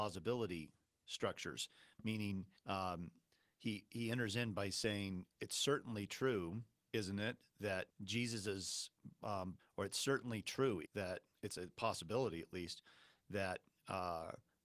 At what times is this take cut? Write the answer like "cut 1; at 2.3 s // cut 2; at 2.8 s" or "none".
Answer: cut 1; at 2.6 s // cut 2; at 9.6 s // cut 3; at 10.8 s